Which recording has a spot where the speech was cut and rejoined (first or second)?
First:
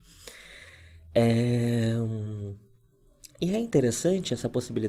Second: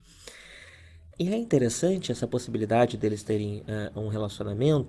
second